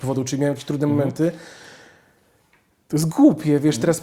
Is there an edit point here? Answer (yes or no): no